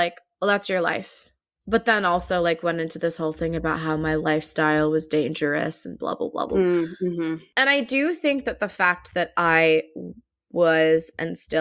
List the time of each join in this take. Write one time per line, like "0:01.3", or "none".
0:01.6